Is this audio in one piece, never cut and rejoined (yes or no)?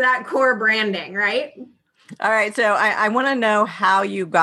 yes